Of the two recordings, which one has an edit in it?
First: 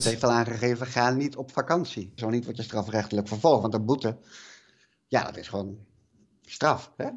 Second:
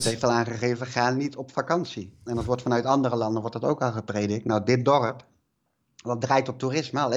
first; 1 cut; at 2.2 s

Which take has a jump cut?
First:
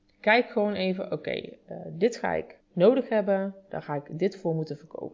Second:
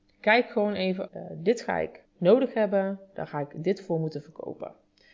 second; 1 cut; at 1.1 s

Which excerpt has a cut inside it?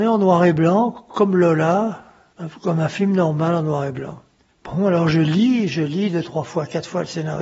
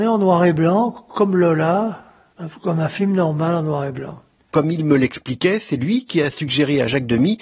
second; 1 cut; at 4.5 s

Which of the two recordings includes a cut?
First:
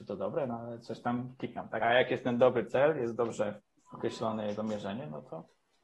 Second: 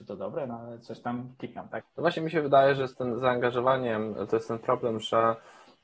second; 2 cuts; at 1.8 s, 4.3 s

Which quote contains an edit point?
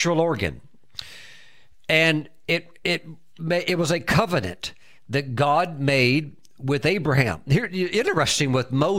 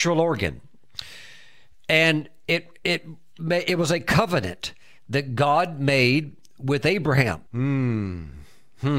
second; 1 cut; at 7.5 s

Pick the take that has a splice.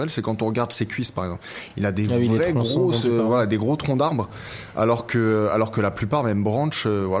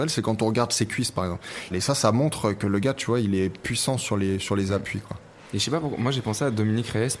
second; 1 cut; at 1.7 s

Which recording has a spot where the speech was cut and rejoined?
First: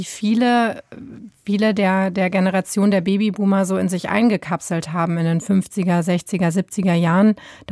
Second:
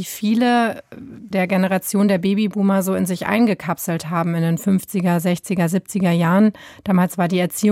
second; 1 cut; at 1.3 s

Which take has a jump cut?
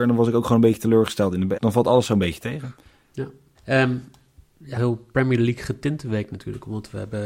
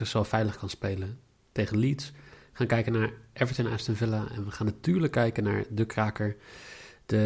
first; 3 cuts; at 1.6 s, 3.5 s, 4.8 s

